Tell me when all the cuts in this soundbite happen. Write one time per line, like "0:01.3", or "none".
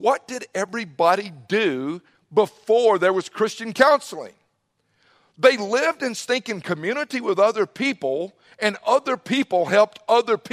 none